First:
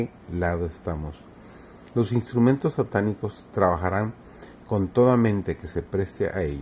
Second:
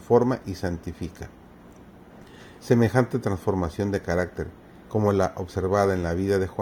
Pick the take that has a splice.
second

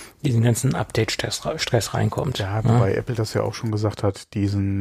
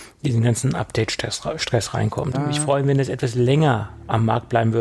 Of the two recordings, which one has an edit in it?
second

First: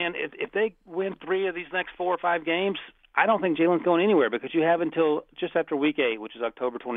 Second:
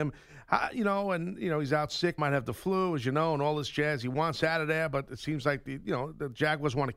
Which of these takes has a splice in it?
second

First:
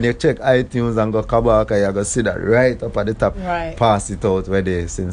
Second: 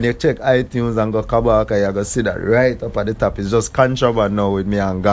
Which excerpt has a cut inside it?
first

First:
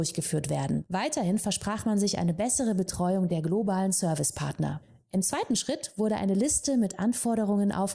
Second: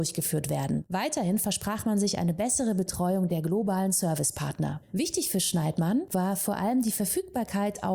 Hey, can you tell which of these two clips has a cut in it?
second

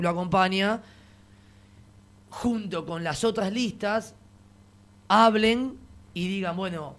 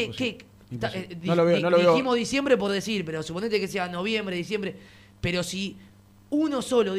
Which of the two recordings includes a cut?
first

